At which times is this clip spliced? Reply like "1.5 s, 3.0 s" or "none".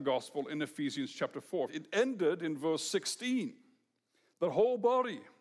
1.7 s